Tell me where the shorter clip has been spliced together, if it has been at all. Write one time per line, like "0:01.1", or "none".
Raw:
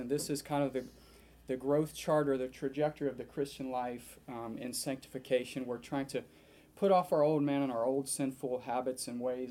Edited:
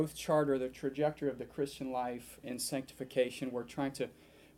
0:02.4